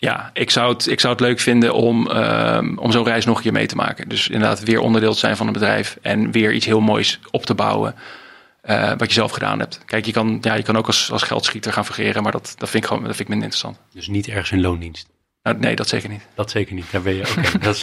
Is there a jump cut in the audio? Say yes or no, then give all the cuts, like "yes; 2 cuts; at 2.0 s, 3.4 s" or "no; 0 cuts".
no; 0 cuts